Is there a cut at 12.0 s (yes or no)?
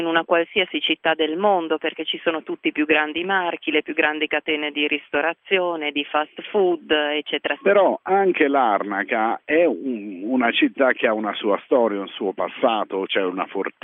no